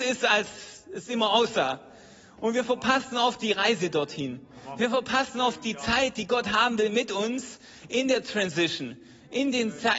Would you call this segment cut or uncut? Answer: uncut